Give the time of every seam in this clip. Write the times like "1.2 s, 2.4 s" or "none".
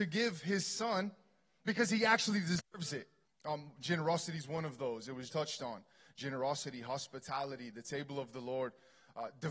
3.3 s, 5.3 s